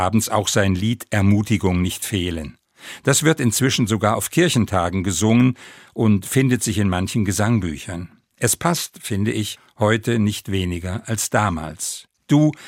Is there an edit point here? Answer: no; 0 cuts

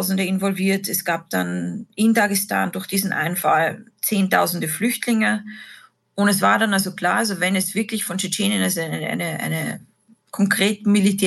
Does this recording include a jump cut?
no; 0 cuts

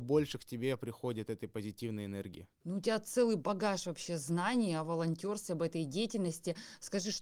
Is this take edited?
no; 0 cuts

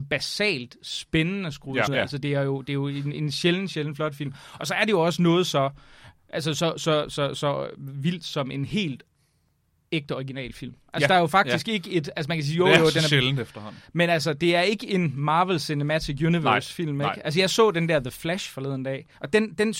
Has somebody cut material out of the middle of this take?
yes; 1 cut; at 1.9 s

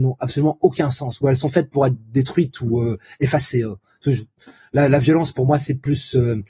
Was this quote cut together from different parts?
no; 0 cuts

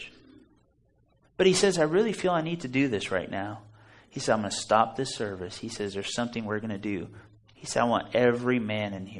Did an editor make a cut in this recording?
no; 0 cuts

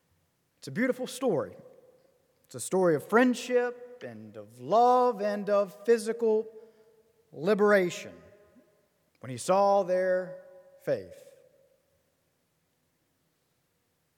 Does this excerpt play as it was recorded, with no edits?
no; 1 cut; at 9.1 s

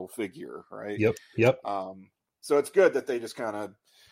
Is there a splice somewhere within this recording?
no; 0 cuts

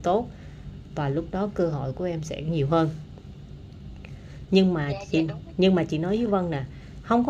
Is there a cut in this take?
no; 0 cuts

